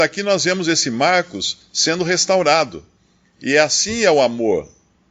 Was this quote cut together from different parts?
no; 0 cuts

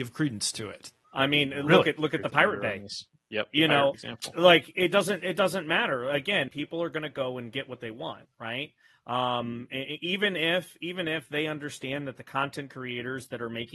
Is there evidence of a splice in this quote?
yes; 3 cuts; at 1.0 s, 3.9 s, 6.5 s

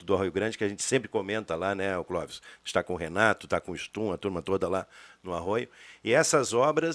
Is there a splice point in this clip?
no; 0 cuts

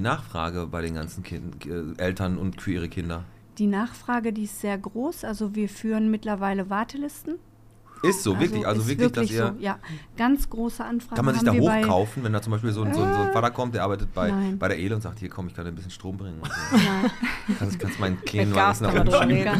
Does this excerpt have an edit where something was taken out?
no; 0 cuts

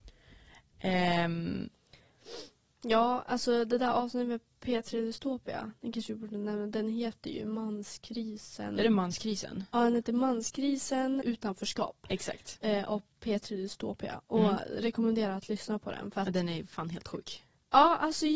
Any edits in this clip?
yes; 1 cut; at 11.2 s

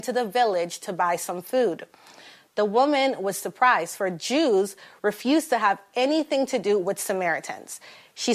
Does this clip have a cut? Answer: no; 0 cuts

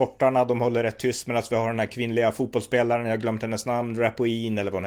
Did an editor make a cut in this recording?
no; 0 cuts

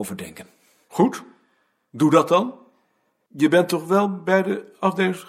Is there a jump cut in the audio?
yes; 1 cut; at 3.3 s

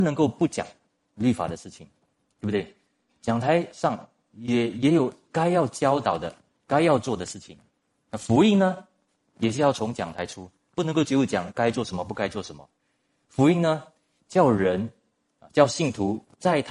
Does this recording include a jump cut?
no; 0 cuts

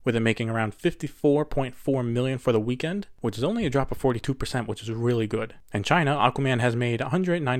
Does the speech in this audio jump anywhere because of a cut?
no; 0 cuts

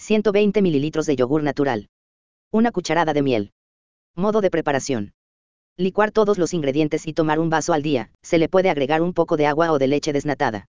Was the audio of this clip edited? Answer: yes; 1 cut; at 8.1 s

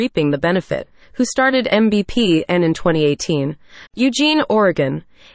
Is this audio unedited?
no; 2 cuts; at 1.0 s, 3.9 s

